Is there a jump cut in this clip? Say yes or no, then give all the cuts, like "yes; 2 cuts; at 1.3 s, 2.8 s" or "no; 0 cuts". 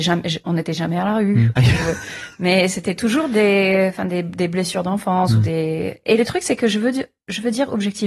yes; 1 cut; at 1.6 s